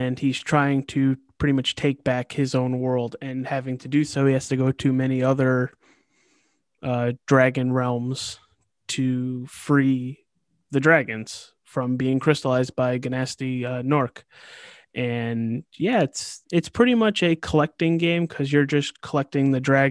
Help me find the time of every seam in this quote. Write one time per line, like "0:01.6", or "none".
none